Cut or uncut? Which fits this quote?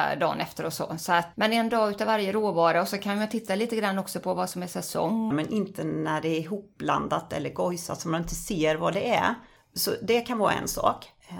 cut